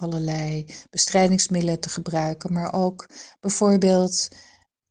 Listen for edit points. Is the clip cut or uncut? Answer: uncut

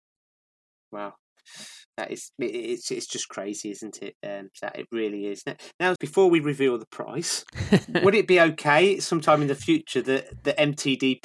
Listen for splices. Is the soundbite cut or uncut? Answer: cut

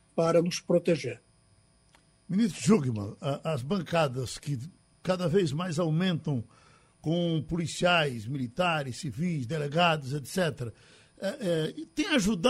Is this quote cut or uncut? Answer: uncut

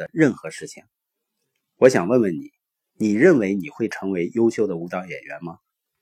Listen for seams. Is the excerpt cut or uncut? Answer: cut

